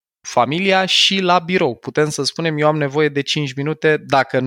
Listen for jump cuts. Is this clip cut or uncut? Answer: uncut